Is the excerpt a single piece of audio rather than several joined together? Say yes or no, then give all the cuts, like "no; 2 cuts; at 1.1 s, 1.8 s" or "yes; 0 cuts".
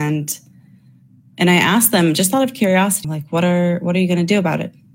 no; 1 cut; at 3.0 s